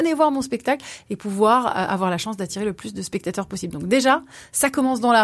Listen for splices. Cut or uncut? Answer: uncut